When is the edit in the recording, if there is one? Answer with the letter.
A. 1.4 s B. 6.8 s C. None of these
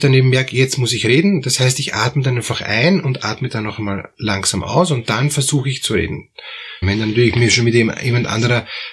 B